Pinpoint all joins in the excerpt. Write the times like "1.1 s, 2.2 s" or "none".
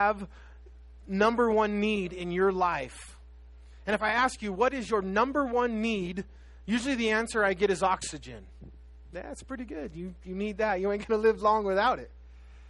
none

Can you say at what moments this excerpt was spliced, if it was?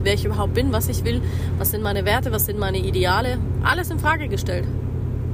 none

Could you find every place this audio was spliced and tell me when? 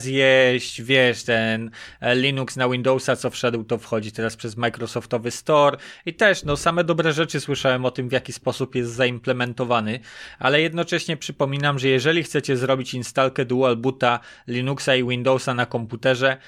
none

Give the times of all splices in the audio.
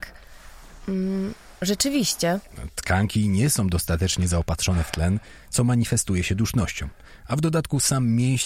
none

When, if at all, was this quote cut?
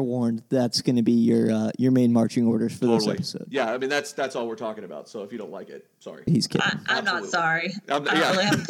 6.3 s

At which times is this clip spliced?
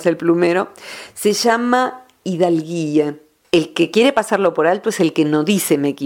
3.4 s

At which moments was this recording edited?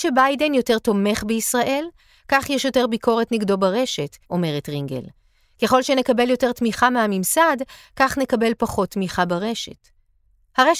4.2 s

